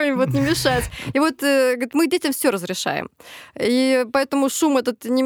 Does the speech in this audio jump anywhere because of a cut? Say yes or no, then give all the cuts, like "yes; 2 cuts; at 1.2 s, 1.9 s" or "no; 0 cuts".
no; 0 cuts